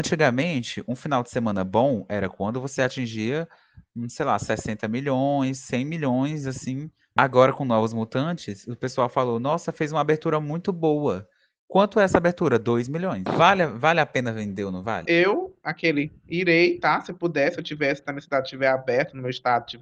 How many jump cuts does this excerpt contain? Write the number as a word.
three